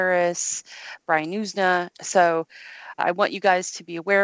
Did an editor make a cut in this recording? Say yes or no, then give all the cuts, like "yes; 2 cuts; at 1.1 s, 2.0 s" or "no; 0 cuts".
yes; 2 cuts; at 1.9 s, 3.0 s